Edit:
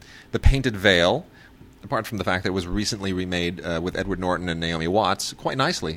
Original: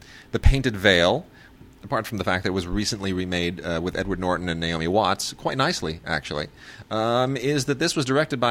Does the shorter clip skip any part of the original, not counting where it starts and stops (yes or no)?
no